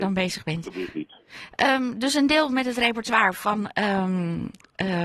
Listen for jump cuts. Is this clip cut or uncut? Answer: uncut